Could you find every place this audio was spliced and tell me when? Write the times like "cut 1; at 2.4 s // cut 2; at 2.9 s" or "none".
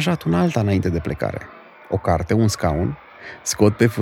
none